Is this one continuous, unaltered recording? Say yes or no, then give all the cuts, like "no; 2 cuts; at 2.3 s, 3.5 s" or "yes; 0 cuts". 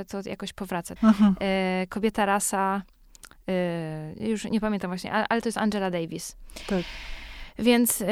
no; 1 cut; at 1.0 s